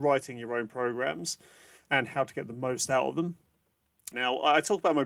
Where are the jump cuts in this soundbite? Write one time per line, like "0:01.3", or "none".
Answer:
0:04.1